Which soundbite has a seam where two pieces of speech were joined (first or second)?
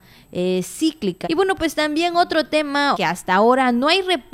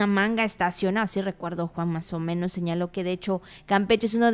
first